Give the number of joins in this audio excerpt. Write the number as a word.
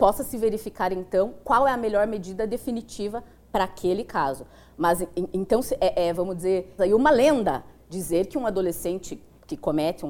one